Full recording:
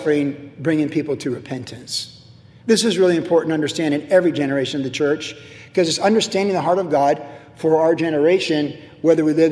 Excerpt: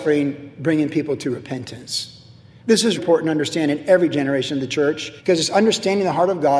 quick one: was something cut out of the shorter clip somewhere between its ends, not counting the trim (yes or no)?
yes